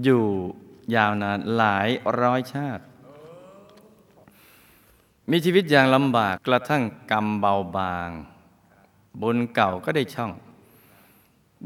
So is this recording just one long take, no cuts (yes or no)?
no